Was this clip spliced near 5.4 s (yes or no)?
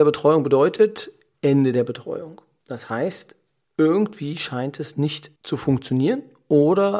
yes